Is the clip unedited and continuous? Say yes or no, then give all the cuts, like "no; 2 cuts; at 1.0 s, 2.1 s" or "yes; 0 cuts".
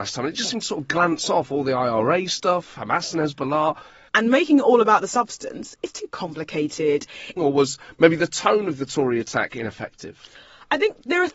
no; 2 cuts; at 4.1 s, 7.4 s